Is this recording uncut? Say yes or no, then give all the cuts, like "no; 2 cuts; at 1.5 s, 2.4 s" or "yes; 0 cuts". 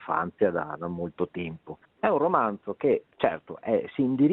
no; 2 cuts; at 1.8 s, 3.1 s